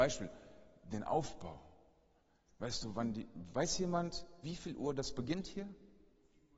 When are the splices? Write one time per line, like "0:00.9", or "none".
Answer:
0:02.5
0:04.4